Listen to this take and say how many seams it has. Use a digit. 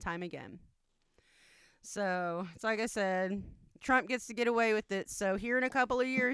0